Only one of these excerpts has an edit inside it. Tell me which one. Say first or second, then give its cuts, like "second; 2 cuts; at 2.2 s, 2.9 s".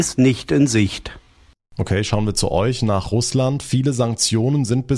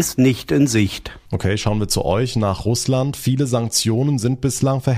second; 1 cut; at 1.2 s